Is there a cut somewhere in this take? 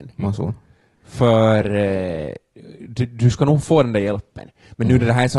no; 0 cuts

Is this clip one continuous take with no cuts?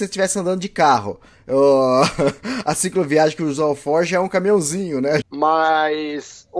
no; 1 cut; at 5.2 s

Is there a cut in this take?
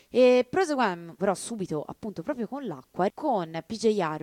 yes; 2 cuts; at 1.2 s, 3.1 s

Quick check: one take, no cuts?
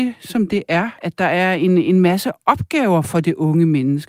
no; 1 cut; at 1.0 s

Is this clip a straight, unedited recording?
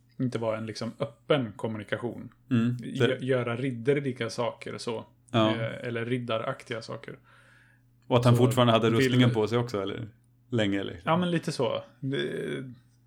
no; 1 cut; at 2.8 s

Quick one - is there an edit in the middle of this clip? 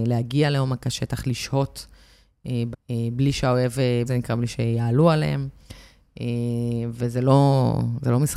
yes; 2 cuts; at 2.7 s, 4.1 s

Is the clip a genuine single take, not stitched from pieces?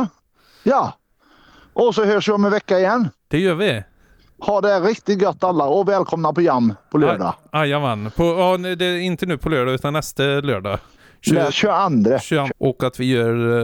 no; 2 cuts; at 11.5 s, 12.5 s

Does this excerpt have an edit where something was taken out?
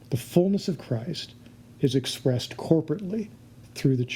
no; 0 cuts

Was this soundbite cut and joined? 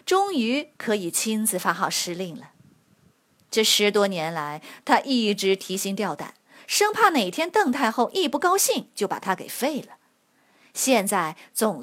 no; 0 cuts

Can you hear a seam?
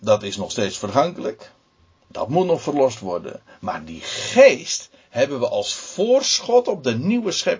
no; 0 cuts

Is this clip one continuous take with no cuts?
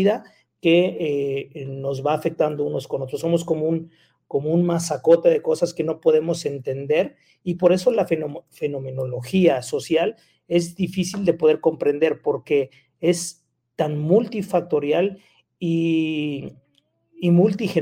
yes; 0 cuts

